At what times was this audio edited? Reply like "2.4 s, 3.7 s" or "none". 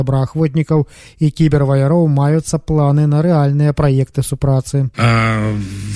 4.9 s